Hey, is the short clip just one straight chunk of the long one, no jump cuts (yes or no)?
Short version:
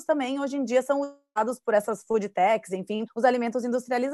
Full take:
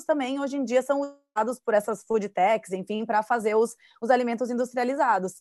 no